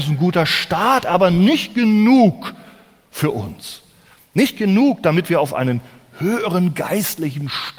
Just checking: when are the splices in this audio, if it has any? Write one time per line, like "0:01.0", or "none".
none